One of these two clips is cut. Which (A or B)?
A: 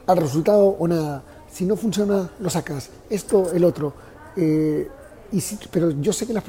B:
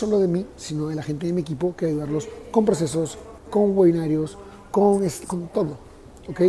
B